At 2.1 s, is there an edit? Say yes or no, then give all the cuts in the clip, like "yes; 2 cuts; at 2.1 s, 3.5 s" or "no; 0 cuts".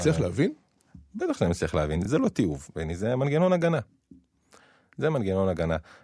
no; 0 cuts